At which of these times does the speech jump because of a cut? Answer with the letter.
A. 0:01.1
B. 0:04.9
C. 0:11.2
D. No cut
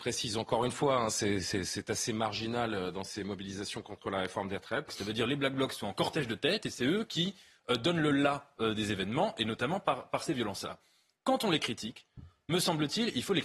B